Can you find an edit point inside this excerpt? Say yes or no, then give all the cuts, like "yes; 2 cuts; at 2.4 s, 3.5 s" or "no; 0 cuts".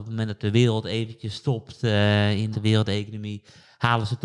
yes; 1 cut; at 2.5 s